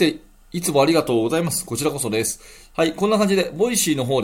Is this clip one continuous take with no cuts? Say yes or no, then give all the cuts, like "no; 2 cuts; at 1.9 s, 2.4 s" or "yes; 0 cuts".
no; 1 cut; at 2.7 s